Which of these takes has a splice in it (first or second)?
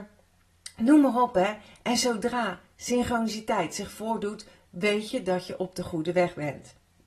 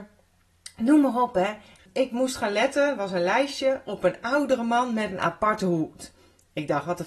second